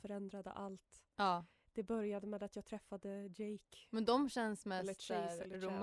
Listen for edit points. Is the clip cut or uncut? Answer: uncut